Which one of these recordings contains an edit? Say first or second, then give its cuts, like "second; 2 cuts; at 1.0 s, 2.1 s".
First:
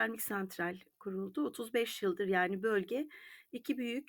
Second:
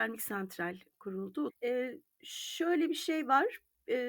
second; 1 cut; at 1.5 s